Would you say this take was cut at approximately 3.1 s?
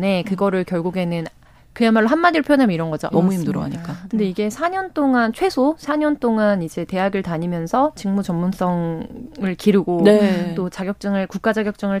yes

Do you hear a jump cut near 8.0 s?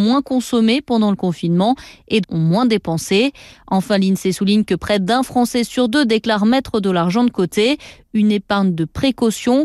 no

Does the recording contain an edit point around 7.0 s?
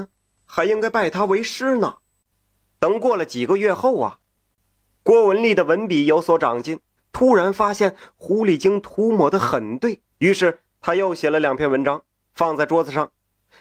yes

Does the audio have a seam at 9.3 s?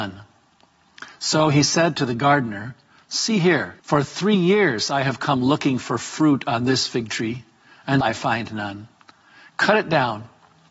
no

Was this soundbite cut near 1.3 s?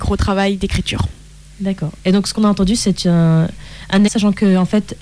no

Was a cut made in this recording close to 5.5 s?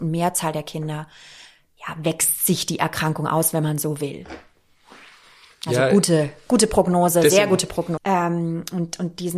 no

